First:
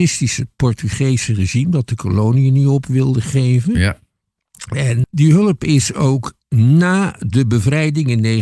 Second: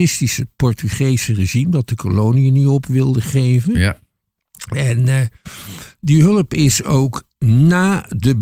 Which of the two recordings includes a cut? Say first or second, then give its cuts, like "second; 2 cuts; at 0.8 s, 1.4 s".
first; 1 cut; at 5.0 s